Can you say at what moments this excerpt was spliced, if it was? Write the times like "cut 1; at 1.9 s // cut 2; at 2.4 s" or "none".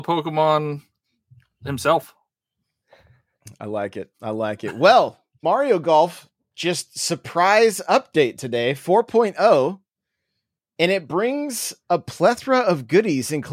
cut 1; at 5.4 s